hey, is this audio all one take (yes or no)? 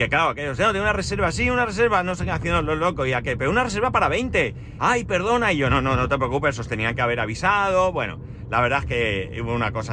no